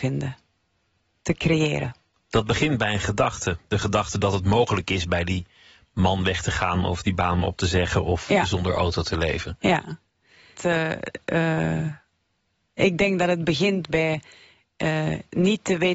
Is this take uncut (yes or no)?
no